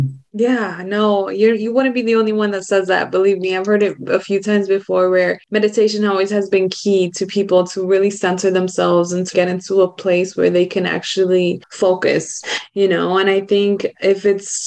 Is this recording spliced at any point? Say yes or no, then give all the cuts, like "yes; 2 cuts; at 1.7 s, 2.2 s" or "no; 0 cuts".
yes; 1 cut; at 9.3 s